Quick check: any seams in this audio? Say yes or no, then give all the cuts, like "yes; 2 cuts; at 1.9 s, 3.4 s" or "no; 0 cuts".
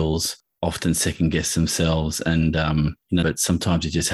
yes; 1 cut; at 3.2 s